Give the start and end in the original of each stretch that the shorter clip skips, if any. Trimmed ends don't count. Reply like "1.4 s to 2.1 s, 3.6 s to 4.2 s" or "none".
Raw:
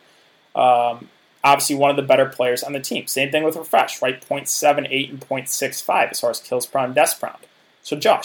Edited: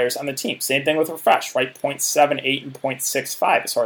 none